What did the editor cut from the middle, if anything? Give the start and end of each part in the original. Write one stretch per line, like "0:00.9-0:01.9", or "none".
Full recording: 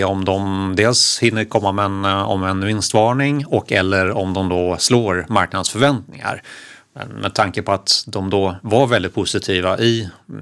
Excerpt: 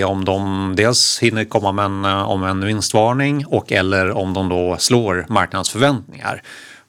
none